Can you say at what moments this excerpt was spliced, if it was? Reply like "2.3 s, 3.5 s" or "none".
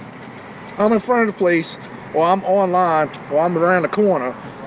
none